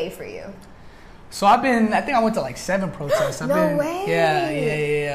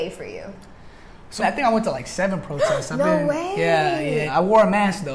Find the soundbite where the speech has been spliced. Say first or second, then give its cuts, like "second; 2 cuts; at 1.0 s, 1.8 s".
second; 2 cuts; at 1.4 s, 4.3 s